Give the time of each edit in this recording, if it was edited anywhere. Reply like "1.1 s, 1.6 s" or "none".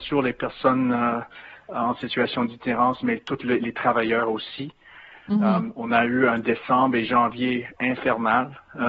7.8 s